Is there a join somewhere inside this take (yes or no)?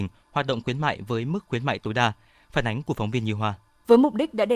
no